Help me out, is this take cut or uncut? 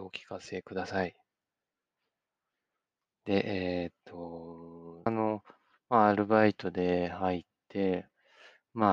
cut